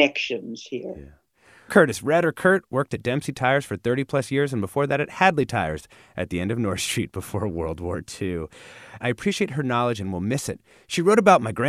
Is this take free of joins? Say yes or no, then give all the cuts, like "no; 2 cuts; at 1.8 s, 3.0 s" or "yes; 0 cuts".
no; 2 cuts; at 1.7 s, 9.0 s